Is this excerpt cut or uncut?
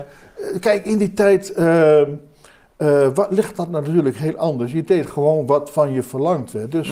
uncut